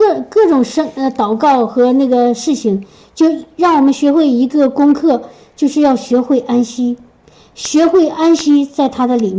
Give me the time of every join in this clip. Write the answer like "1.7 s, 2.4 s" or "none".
none

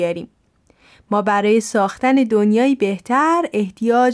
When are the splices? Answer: none

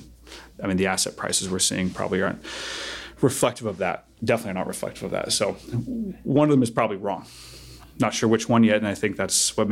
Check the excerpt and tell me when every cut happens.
none

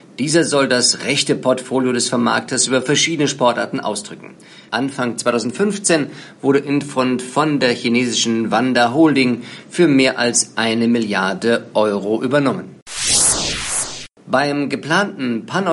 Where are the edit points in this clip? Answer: 4.7 s

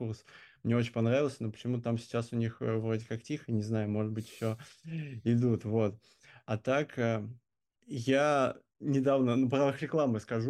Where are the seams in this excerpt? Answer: none

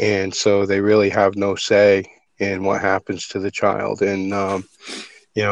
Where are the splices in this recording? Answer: none

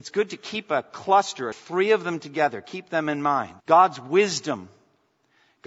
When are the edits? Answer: 1.5 s, 3.6 s

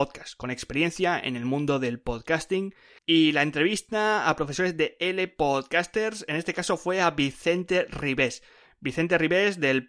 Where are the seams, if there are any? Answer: 3.0 s

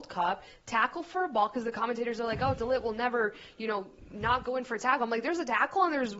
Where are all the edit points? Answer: none

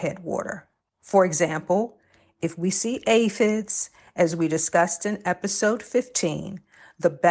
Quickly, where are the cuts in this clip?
none

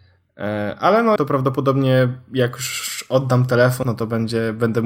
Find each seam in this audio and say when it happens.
1.2 s, 3.8 s

